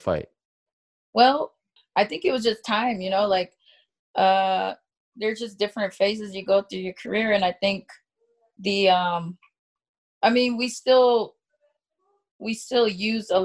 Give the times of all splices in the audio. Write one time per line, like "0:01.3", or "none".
0:01.8

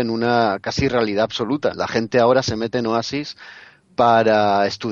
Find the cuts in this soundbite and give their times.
0:01.7

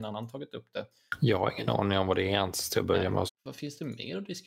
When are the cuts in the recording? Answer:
0:03.3

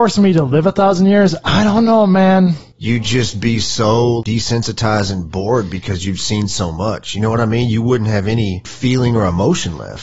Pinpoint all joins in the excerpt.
none

